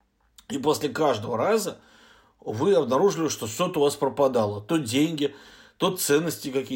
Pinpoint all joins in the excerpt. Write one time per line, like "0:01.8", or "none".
none